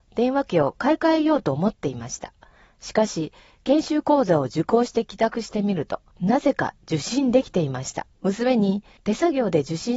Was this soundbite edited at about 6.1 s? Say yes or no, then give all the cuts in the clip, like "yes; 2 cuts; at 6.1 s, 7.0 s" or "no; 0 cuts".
yes; 2 cuts; at 6.1 s, 8.1 s